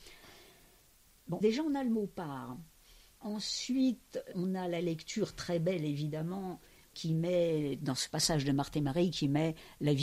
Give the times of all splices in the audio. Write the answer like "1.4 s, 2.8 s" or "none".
1.4 s